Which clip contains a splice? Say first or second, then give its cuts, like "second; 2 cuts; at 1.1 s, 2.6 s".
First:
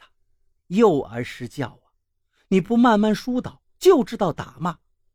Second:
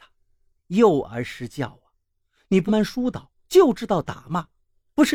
second; 1 cut; at 2.7 s